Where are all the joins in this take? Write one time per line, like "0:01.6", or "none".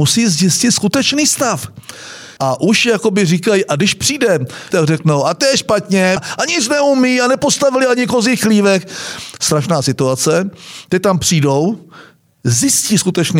0:02.4
0:04.7
0:06.2